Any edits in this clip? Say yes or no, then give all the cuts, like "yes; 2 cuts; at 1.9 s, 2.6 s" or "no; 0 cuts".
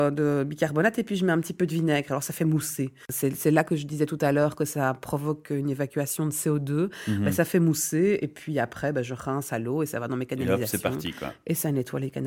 no; 0 cuts